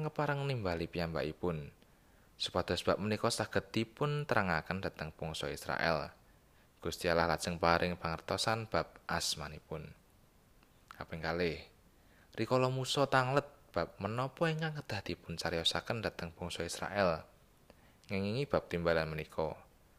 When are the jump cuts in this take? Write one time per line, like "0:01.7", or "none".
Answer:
none